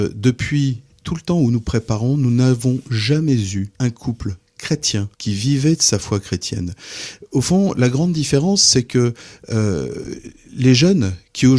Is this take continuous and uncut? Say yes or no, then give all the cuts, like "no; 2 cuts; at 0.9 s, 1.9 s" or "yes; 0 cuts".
no; 2 cuts; at 3.7 s, 5.1 s